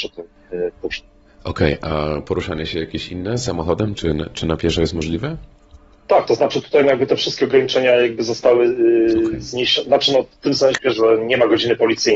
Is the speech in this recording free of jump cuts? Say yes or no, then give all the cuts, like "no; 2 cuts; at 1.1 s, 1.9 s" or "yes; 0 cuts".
no; 1 cut; at 3.9 s